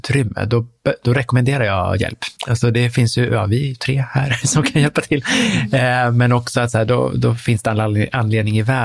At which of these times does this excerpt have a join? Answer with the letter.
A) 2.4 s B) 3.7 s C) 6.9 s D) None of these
A